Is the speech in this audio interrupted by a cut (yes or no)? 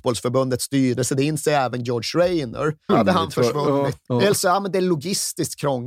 yes